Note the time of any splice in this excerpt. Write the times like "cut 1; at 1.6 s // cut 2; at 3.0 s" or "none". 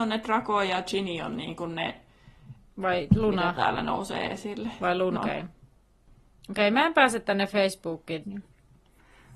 cut 1; at 5.2 s // cut 2; at 8.2 s